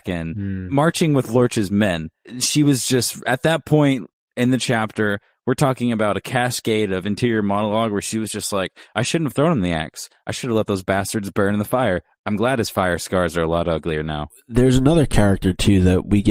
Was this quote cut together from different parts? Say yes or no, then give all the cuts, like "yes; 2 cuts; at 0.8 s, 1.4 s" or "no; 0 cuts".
no; 0 cuts